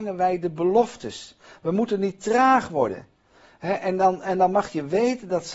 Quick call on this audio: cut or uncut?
uncut